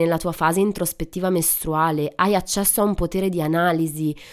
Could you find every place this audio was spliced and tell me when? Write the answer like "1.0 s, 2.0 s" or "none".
none